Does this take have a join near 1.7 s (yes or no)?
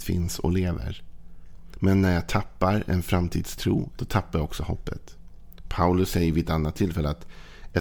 no